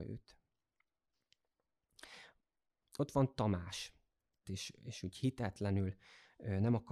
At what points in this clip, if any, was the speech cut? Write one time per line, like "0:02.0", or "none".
0:02.8
0:04.4